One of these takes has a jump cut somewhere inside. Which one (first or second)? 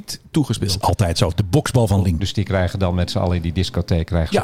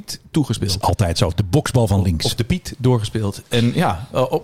first